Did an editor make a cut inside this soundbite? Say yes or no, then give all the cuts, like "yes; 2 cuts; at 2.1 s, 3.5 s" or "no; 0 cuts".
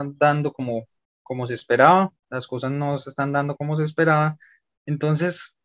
yes; 2 cuts; at 2.2 s, 3.6 s